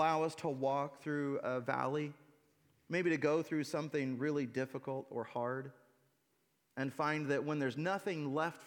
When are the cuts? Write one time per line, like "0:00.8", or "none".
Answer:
none